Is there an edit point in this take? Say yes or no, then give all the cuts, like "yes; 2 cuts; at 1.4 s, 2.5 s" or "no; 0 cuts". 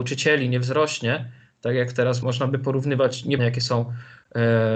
yes; 2 cuts; at 2.2 s, 3.4 s